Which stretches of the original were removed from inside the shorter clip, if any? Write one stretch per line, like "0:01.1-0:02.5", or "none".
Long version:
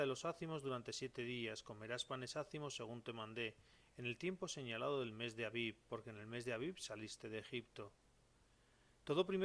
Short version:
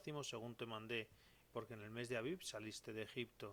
0:03.9-0:05.8